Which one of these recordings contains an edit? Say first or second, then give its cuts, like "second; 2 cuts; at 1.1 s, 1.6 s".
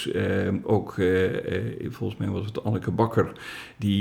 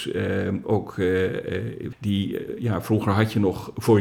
second; 1 cut; at 1.9 s